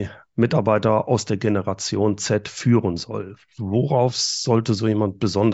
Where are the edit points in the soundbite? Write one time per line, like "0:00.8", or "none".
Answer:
none